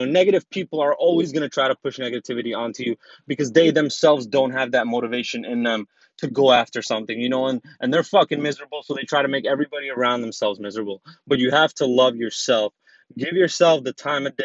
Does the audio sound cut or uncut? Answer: uncut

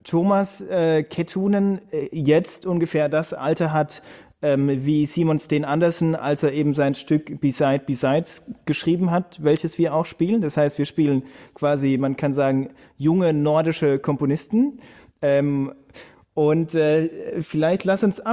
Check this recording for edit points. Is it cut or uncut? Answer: uncut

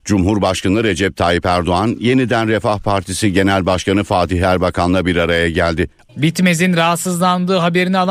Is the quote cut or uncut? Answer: cut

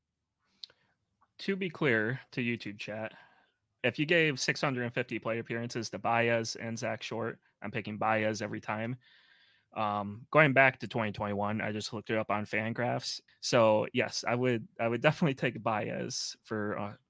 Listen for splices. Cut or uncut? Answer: cut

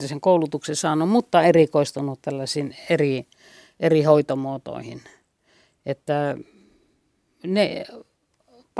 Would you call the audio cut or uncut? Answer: uncut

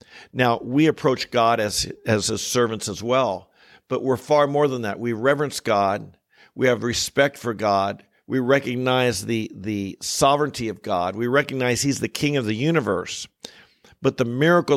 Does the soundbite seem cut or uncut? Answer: uncut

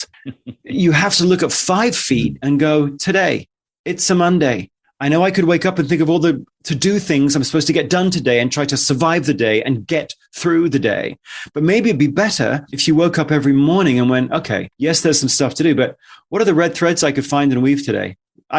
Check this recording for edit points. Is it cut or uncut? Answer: uncut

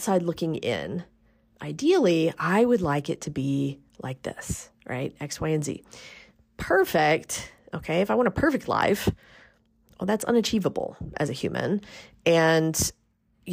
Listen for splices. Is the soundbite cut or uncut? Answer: uncut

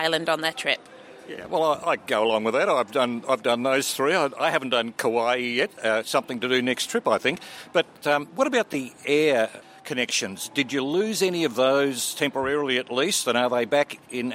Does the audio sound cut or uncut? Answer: uncut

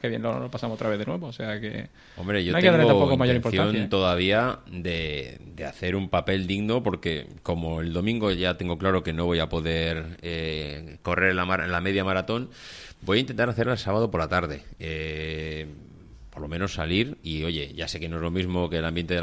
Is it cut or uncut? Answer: uncut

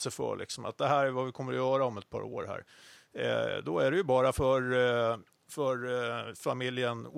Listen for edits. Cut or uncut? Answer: uncut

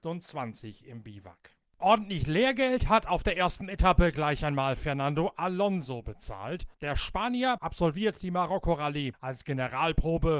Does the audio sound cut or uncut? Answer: uncut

